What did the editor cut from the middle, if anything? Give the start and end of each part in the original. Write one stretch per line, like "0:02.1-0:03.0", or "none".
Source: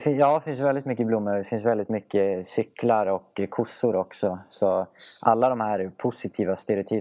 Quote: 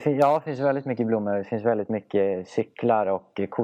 none